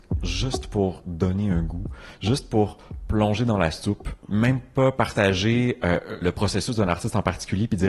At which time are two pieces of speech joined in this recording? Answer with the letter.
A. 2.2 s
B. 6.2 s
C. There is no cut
B